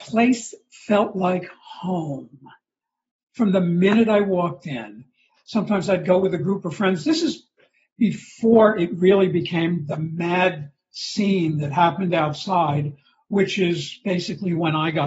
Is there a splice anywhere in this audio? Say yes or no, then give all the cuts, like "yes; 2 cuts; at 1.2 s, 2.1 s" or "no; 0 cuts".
yes; 1 cut; at 5.4 s